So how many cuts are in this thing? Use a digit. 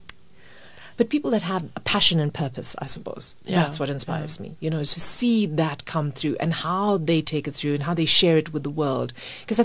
1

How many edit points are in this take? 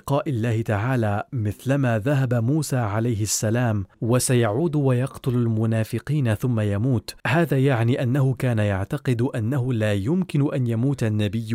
2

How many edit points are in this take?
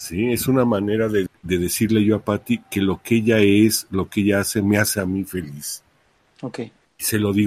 1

